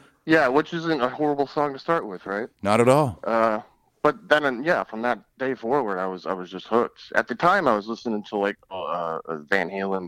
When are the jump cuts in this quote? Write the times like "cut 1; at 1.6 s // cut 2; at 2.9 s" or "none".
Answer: none